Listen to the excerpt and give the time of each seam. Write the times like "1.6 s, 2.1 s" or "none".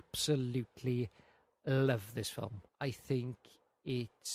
2.7 s